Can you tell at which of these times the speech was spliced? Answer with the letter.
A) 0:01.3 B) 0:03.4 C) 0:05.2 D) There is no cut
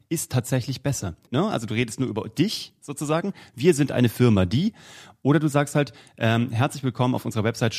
A